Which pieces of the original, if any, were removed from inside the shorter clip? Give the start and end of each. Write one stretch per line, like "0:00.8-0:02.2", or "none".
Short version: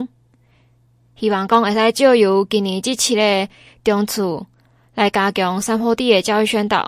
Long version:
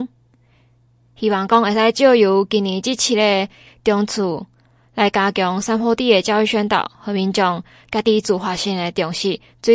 none

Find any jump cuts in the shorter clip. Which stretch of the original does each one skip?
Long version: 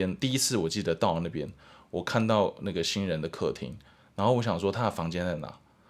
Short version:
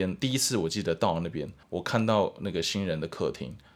0:01.6-0:01.8

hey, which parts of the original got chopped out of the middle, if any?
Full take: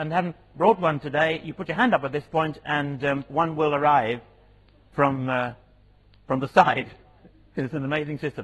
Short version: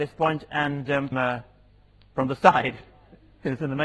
0:03.3-0:05.2

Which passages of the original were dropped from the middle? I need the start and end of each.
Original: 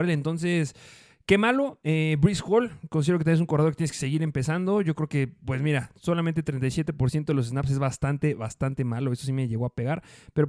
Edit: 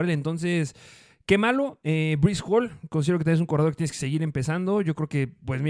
none

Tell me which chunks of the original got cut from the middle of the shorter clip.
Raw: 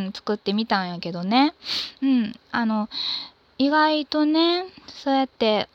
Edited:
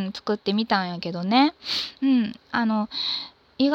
none

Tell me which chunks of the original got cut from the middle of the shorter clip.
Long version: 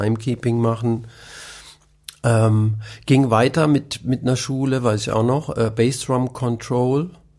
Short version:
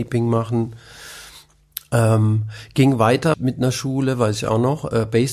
0:03.7-0:04.0

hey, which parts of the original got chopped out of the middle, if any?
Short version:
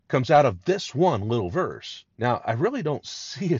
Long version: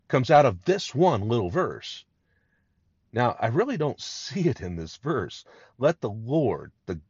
0:02.1-0:03.1

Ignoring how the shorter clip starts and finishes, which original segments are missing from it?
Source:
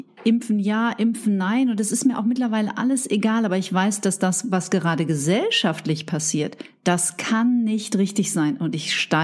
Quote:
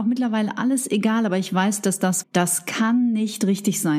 0:04.4-0:06.7

